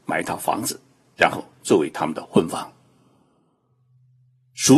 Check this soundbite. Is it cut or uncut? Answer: uncut